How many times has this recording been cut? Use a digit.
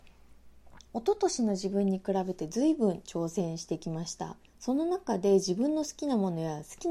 1